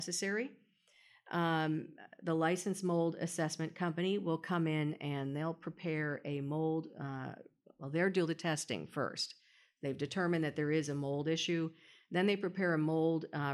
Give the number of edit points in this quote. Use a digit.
0